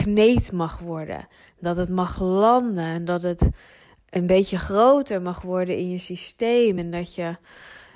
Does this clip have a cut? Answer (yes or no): no